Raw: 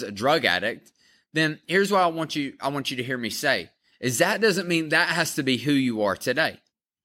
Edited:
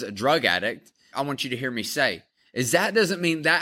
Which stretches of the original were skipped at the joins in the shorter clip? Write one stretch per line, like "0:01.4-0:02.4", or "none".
0:01.1-0:02.6